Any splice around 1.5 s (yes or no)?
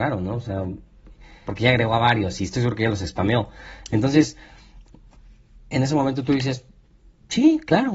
yes